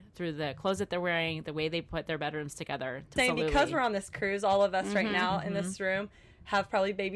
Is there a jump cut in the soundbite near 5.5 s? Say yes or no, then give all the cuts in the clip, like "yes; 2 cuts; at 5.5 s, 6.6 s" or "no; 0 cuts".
no; 1 cut; at 3.2 s